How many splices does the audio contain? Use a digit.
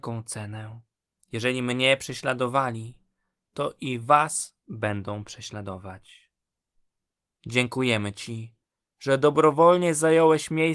3